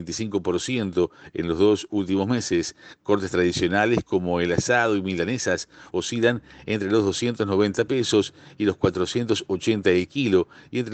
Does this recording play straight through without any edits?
yes; 0 cuts

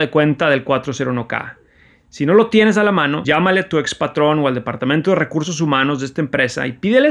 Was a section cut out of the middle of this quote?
yes; 1 cut; at 3.2 s

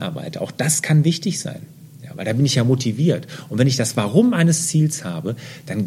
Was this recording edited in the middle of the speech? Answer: no; 0 cuts

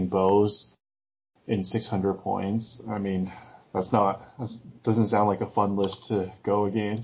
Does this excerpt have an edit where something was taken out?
no; 0 cuts

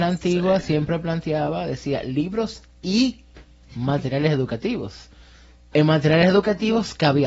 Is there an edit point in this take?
no; 0 cuts

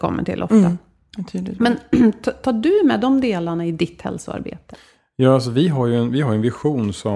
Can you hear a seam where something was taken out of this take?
no; 0 cuts

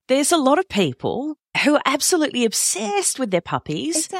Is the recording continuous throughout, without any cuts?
yes; 0 cuts

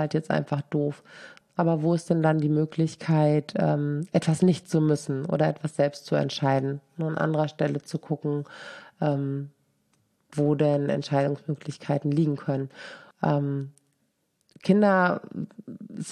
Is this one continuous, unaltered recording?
no; 2 cuts; at 1.4 s, 13.1 s

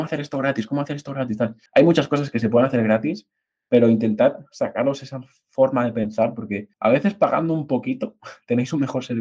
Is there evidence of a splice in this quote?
yes; 2 cuts; at 1.7 s, 6.7 s

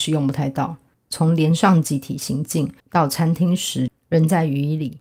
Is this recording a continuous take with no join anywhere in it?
no; 3 cuts; at 0.9 s, 2.8 s, 3.9 s

